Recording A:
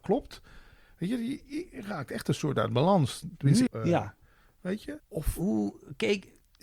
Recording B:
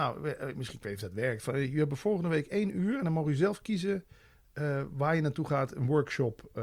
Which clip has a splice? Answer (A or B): A